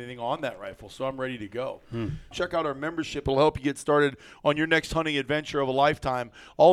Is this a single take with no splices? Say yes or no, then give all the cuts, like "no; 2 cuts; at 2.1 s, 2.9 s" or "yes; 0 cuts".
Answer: no; 1 cut; at 2.3 s